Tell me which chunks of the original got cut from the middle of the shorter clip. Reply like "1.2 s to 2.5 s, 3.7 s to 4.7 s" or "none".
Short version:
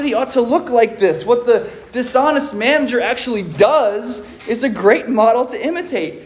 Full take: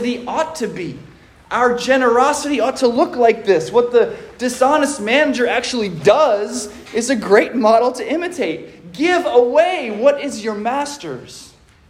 none